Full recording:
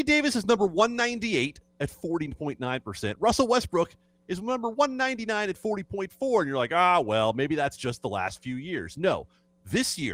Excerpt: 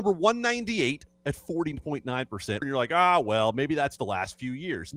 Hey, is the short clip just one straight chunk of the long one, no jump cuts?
no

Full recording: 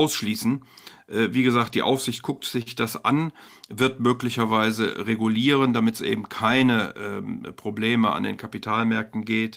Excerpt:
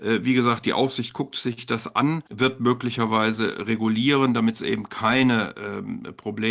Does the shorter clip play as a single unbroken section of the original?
no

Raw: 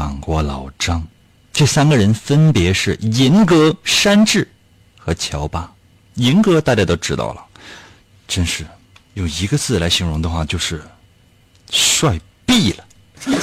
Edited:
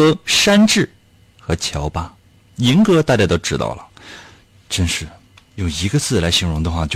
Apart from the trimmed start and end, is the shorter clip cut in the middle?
no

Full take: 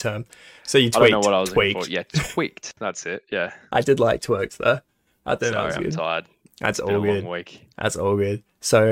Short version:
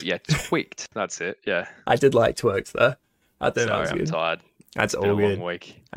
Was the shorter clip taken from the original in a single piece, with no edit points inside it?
yes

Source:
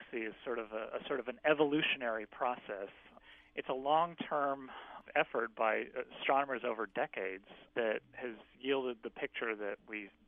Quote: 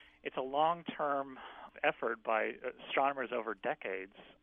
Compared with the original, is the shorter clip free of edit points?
yes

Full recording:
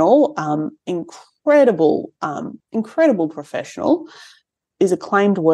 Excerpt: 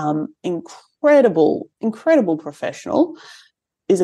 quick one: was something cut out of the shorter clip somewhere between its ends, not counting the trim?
yes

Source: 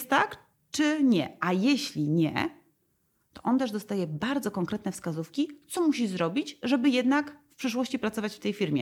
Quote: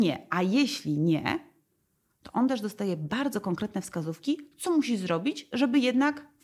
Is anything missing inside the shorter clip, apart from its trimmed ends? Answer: no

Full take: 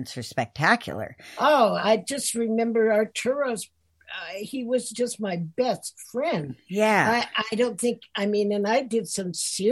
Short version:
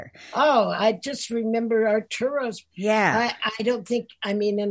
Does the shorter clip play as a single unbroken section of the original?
no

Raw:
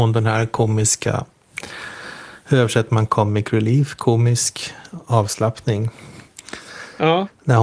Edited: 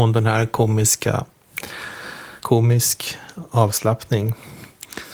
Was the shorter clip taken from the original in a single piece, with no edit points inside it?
no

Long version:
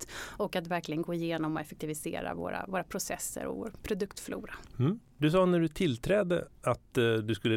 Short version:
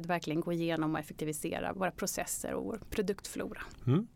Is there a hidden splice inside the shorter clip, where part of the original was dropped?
yes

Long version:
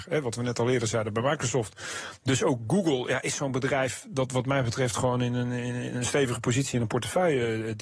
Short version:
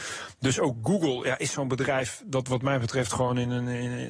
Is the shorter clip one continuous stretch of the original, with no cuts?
yes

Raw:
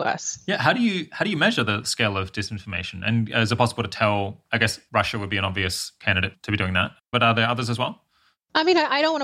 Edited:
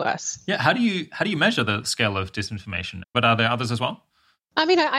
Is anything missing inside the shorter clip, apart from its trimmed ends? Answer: yes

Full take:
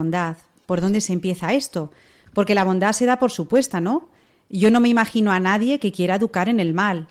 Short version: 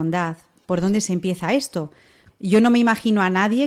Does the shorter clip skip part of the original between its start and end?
yes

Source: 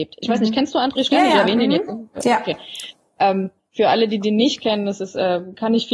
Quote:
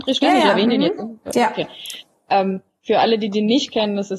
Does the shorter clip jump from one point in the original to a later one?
no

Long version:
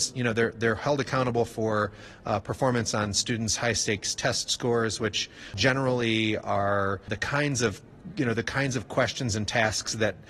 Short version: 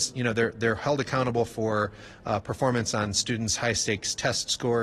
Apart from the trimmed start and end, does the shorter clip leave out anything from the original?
no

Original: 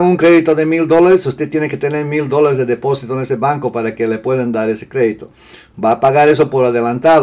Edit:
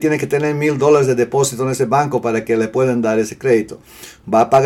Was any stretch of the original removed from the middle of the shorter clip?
no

